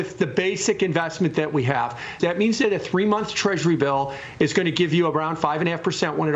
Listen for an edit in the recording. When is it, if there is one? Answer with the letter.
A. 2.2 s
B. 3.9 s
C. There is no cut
A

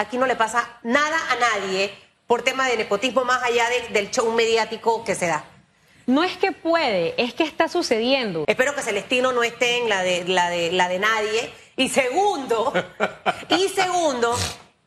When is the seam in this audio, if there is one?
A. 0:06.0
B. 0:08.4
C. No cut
B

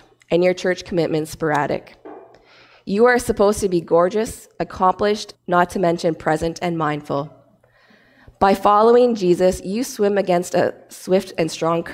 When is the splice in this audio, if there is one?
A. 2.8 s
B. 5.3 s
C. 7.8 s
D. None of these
B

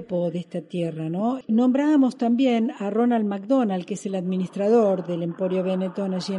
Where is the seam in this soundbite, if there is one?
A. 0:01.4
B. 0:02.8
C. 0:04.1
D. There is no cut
A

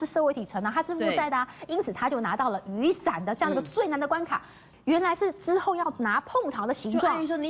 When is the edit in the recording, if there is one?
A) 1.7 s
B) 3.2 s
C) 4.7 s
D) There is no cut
C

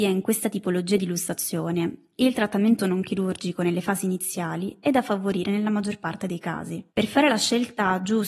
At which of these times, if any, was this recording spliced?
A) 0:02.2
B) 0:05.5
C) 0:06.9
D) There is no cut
C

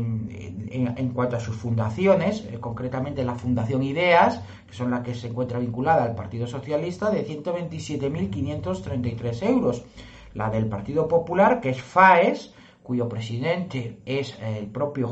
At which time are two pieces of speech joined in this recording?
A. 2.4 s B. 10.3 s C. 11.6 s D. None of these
D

